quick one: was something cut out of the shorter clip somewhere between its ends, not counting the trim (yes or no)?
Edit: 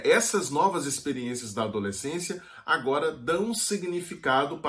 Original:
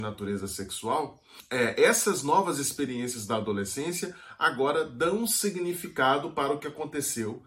no